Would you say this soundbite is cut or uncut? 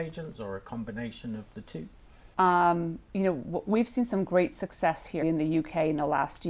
cut